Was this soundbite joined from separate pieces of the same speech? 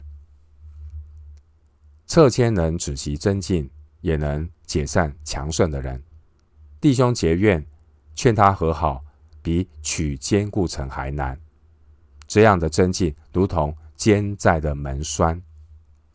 no; 0 cuts

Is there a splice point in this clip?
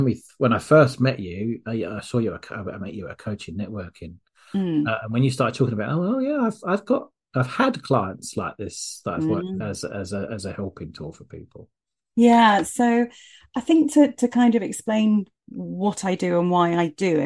yes; 1 cut; at 9.6 s

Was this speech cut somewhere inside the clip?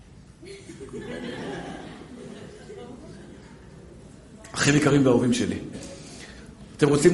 no; 0 cuts

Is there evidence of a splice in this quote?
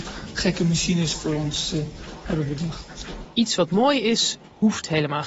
yes; 1 cut; at 3.2 s

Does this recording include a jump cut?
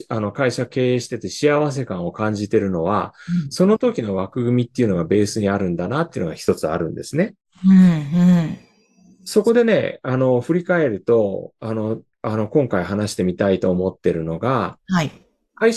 yes; 1 cut; at 12.1 s

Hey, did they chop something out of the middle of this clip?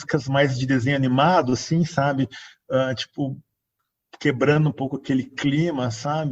no; 0 cuts

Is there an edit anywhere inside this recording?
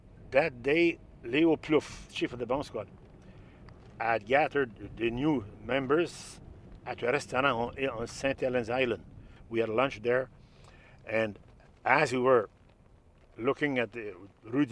no; 0 cuts

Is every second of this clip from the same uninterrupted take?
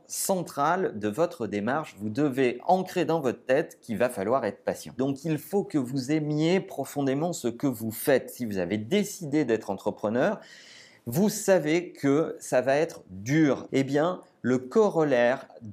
no; 2 cuts; at 5.0 s, 13.7 s

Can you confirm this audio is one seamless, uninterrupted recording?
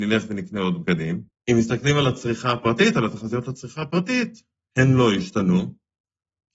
no; 1 cut; at 1.3 s

